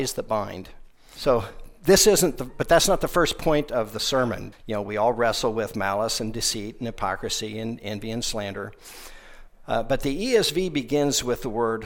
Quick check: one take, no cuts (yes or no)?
no